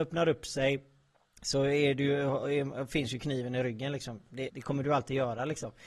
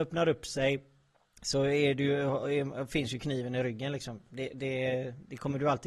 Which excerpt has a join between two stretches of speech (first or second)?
first